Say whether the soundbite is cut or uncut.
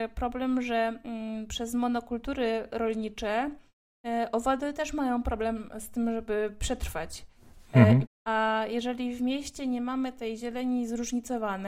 cut